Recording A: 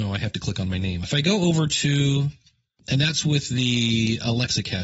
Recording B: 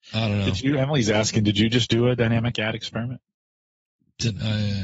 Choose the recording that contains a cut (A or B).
A